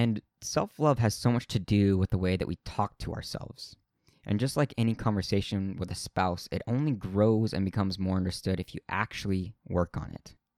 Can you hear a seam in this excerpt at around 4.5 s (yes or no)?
no